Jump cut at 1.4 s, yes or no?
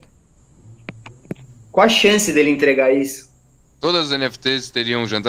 no